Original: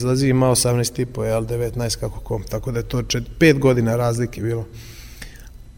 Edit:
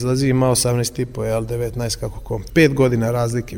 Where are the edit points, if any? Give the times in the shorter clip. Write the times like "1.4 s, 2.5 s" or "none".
2.5 s